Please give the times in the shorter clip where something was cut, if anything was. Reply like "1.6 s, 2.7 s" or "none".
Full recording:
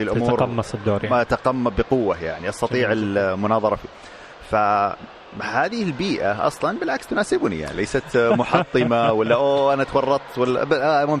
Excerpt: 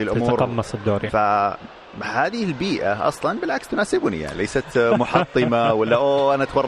1.1 s